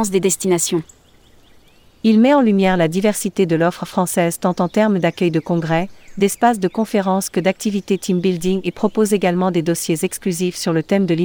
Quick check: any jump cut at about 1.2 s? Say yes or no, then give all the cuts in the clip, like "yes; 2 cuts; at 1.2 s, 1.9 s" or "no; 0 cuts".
no; 0 cuts